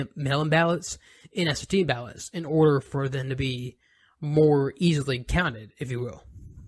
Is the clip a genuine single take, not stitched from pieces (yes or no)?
yes